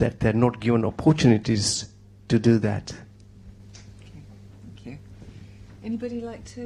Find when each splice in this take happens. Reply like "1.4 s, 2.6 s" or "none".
none